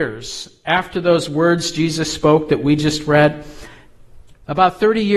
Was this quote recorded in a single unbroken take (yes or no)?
yes